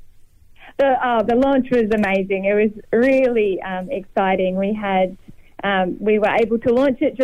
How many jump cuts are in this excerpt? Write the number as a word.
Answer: zero